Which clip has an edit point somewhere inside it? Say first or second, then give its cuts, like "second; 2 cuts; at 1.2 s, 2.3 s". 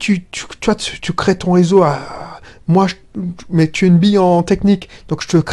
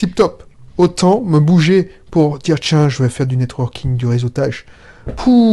first; 1 cut; at 1.0 s